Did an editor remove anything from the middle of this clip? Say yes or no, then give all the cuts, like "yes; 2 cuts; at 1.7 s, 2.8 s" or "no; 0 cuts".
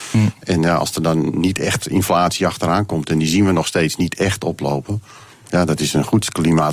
no; 0 cuts